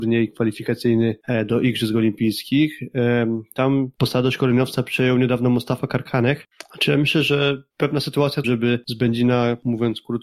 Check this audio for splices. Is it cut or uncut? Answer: cut